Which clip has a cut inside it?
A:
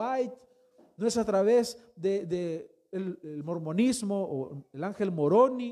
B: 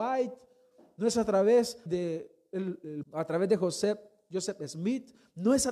B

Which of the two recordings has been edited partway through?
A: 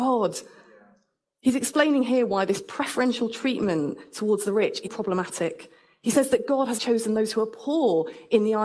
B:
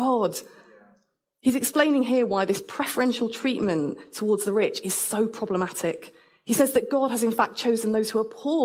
A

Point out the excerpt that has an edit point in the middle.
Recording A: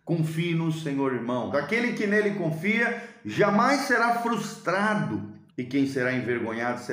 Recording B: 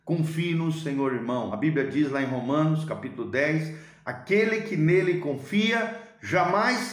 A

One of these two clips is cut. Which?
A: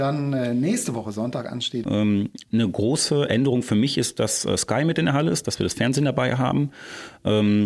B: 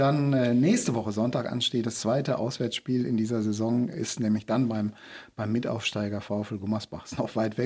A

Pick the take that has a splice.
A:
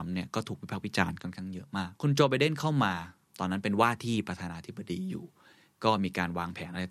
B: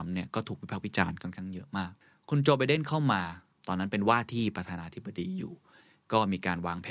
A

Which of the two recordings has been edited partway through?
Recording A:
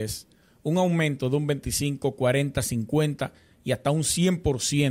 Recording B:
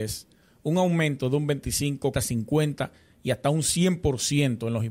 B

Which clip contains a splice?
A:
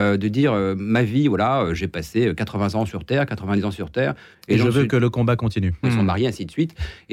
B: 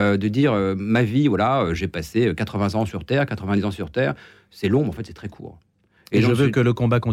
A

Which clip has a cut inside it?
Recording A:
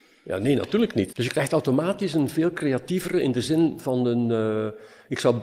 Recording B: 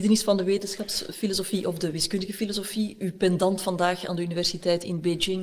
A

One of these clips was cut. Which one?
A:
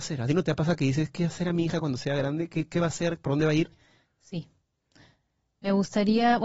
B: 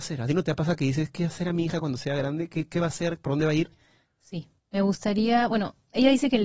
B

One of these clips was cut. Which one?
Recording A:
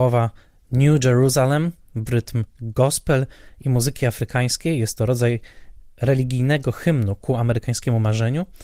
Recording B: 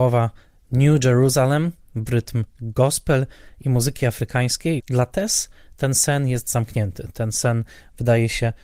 B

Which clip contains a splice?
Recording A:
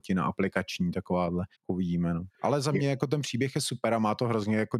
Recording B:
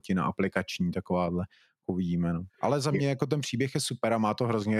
A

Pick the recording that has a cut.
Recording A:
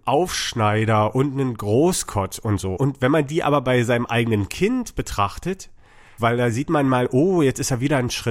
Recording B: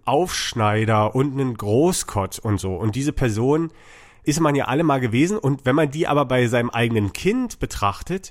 A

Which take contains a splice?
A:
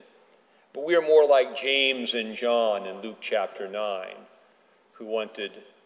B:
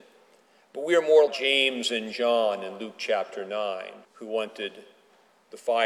B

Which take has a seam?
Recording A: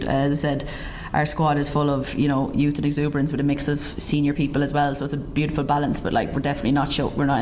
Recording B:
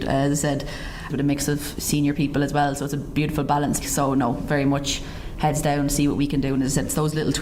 B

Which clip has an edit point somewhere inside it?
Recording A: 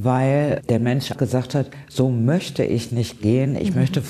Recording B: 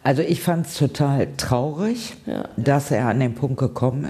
A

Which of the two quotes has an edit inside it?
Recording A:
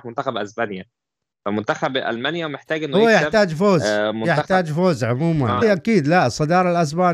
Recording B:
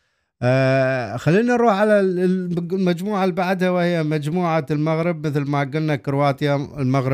A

